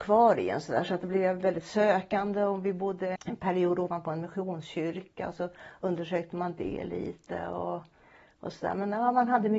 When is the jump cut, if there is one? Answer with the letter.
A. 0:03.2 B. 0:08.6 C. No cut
A